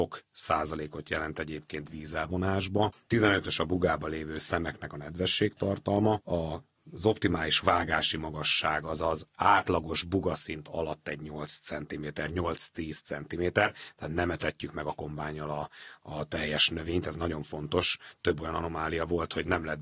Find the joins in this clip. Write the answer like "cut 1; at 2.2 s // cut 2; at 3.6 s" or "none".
none